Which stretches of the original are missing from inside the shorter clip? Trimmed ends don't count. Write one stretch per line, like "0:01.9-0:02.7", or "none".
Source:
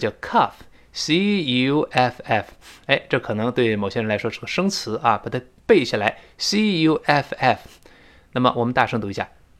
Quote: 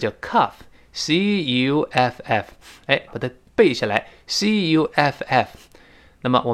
0:03.1-0:05.2